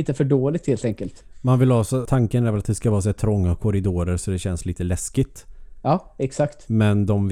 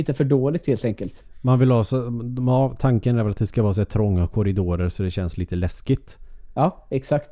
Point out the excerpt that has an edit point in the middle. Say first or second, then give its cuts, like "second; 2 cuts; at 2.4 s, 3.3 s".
first; 1 cut; at 2.0 s